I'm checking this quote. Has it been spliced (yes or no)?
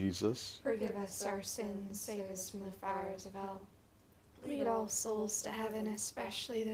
no